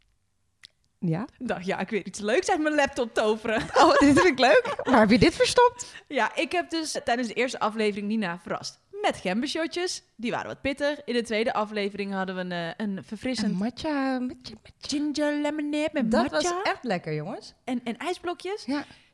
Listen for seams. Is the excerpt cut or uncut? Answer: cut